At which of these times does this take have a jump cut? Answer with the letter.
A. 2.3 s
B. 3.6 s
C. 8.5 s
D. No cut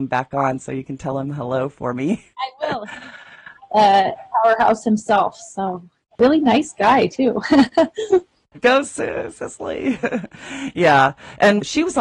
C